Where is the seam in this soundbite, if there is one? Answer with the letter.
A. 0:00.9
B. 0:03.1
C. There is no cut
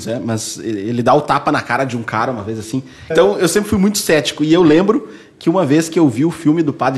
B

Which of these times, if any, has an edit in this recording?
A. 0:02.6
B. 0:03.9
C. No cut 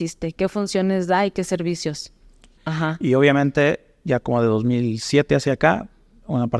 A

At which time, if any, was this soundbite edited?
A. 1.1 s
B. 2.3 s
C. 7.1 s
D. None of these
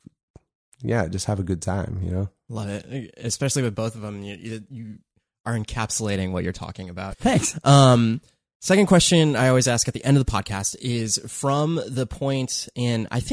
C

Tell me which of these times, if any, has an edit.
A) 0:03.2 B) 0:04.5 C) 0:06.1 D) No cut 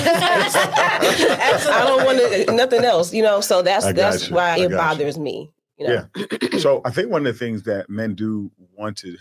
B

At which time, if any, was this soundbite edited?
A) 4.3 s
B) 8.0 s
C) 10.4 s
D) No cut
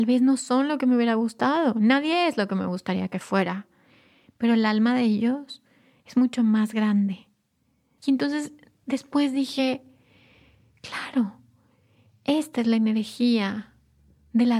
B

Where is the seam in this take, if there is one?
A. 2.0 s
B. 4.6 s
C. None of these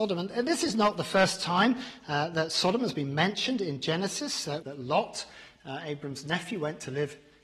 B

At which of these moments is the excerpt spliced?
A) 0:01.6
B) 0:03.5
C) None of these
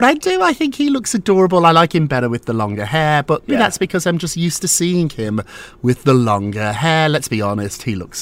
B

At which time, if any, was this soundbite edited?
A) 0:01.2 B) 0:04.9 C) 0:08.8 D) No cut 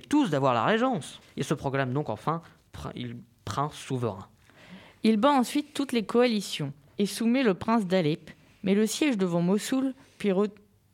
A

